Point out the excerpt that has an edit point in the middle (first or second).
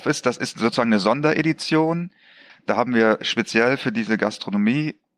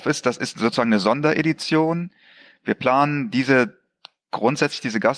first